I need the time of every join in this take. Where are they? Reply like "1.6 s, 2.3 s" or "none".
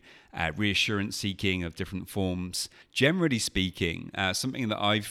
2.8 s